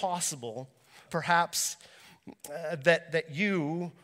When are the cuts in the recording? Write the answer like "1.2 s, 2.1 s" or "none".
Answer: 1.1 s